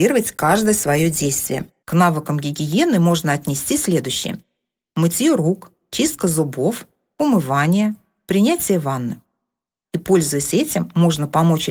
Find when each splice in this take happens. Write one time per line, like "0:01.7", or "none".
0:01.8
0:09.8